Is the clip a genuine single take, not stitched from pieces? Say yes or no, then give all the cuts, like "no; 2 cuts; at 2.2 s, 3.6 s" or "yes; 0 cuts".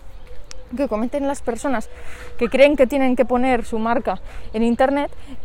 yes; 0 cuts